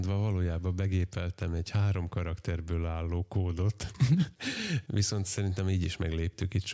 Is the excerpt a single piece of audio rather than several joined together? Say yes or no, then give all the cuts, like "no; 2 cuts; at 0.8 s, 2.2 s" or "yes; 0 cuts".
yes; 0 cuts